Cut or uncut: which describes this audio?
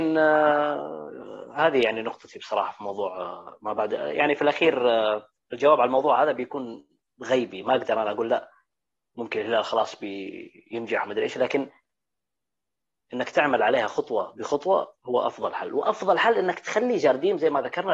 uncut